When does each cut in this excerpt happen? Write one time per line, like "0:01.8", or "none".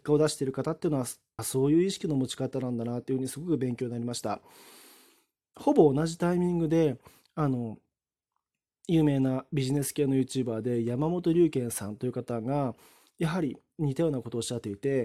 0:01.4